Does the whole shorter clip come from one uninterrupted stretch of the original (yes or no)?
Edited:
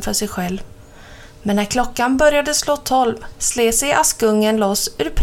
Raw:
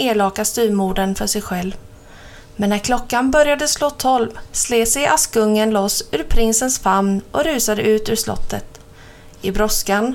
yes